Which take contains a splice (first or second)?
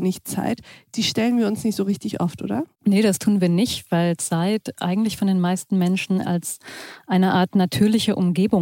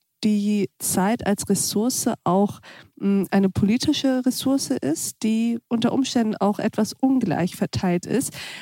first